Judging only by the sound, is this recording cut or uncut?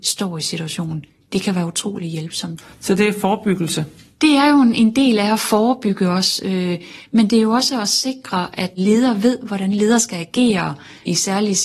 uncut